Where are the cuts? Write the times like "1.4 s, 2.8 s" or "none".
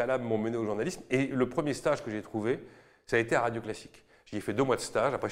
none